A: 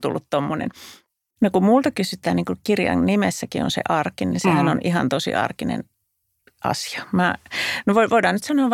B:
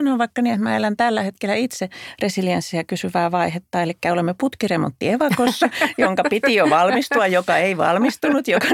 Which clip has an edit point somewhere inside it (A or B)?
A